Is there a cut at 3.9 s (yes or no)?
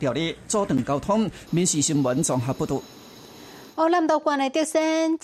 no